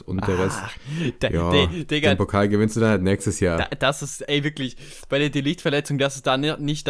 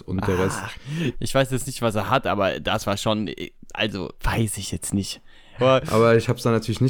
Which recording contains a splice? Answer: second; 3 cuts; at 1.1 s, 4.2 s, 5.6 s

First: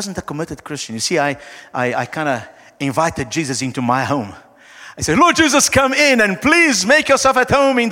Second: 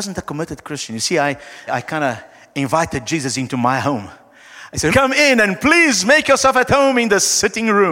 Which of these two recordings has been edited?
second; 2 cuts; at 1.7 s, 4.9 s

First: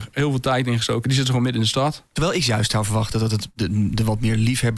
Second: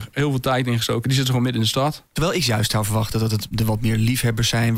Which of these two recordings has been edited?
second; 1 cut; at 3.5 s

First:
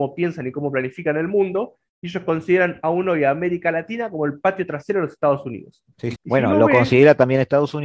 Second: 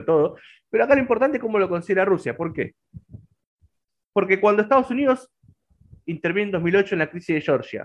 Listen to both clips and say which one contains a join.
first; 1 cut; at 6.1 s

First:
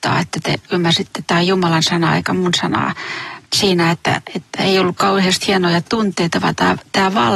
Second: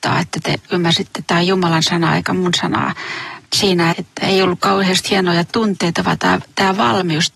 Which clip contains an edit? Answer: second; 1 cut; at 3.9 s

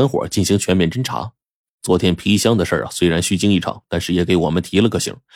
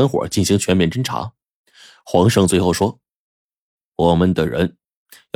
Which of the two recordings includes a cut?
first; 1 cut; at 1.7 s

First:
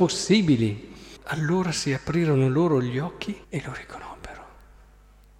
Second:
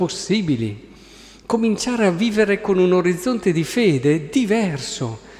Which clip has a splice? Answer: first; 2 cuts; at 1.2 s, 3.4 s

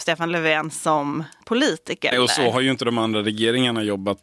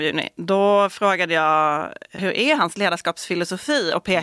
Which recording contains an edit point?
first; 1 cut; at 2.1 s

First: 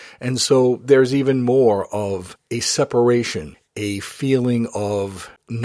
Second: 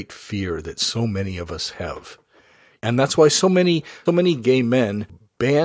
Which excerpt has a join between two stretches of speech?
second; 2 cuts; at 2.8 s, 4.1 s

